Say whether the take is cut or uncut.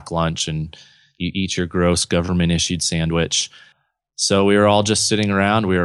uncut